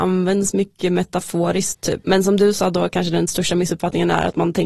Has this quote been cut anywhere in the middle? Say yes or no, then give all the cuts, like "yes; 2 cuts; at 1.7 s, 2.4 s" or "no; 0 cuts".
yes; 1 cut; at 2.0 s